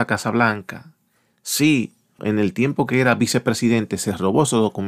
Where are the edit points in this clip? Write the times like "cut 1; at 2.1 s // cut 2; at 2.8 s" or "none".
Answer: cut 1; at 2.2 s

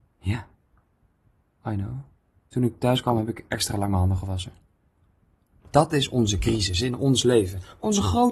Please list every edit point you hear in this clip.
cut 1; at 2.4 s // cut 2; at 5.7 s

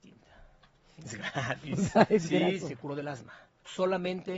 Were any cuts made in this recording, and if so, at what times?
cut 1; at 1.0 s // cut 2; at 2.6 s

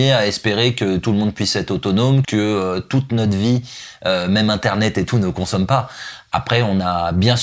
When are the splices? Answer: cut 1; at 2.2 s

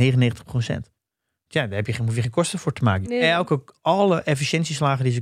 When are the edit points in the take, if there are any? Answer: cut 1; at 3.0 s

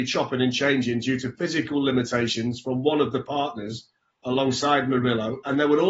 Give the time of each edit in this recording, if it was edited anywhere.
none

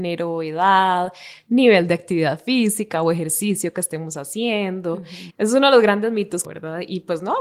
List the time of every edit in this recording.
cut 1; at 5.3 s // cut 2; at 6.4 s

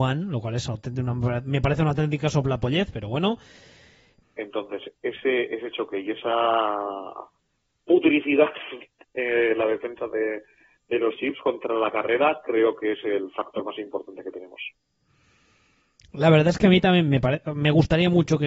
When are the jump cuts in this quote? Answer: cut 1; at 4.2 s

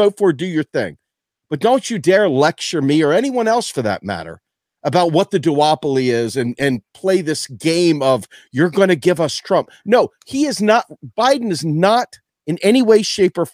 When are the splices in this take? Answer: none

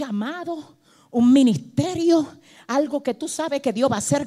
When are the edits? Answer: none

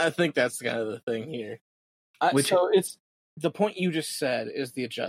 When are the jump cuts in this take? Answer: cut 1; at 3.2 s

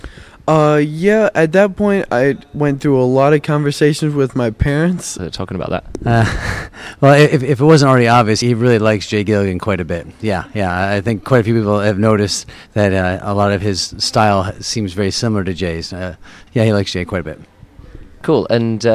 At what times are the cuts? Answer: cut 1; at 5.2 s // cut 2; at 8.4 s // cut 3; at 16.5 s

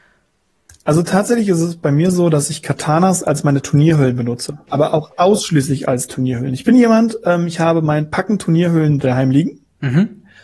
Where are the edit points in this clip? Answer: cut 1; at 4.7 s

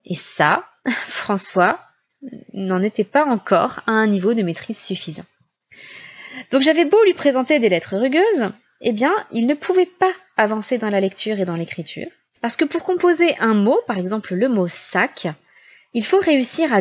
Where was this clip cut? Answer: cut 1; at 12.4 s

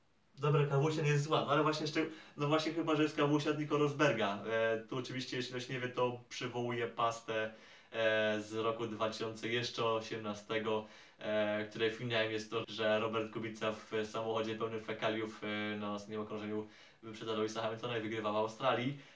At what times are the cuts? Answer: cut 1; at 12.6 s

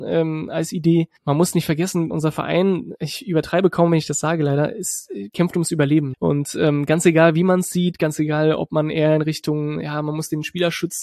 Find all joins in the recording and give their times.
cut 1; at 2.1 s // cut 2; at 6.1 s

